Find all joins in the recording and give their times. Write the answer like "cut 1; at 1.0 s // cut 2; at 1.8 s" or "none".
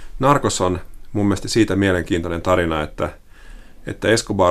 none